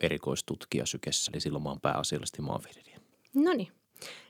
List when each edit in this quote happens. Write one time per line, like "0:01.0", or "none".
0:01.3